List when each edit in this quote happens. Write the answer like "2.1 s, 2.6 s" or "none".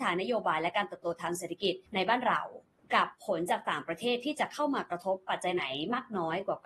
1.9 s